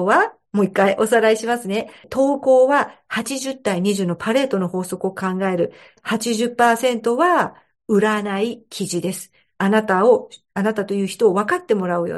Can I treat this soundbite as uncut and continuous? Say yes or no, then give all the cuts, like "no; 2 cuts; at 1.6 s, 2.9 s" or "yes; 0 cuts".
yes; 0 cuts